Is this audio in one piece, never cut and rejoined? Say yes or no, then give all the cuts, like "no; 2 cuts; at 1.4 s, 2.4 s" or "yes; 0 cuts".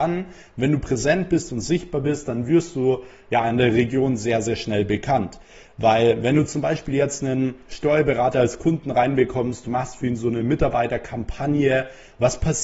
yes; 0 cuts